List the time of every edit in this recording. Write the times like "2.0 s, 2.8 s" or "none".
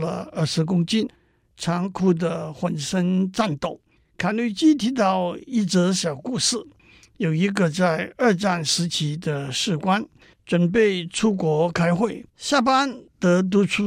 4.0 s, 10.3 s, 12.3 s